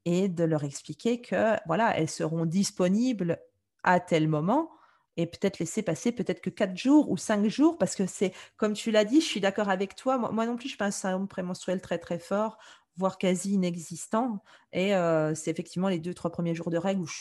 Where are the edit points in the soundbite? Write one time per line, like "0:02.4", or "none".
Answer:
none